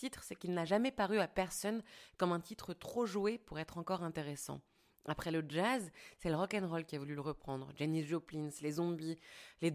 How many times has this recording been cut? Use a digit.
0